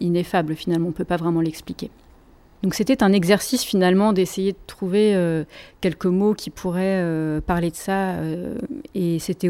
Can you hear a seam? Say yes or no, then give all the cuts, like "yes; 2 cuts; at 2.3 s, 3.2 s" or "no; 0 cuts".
no; 0 cuts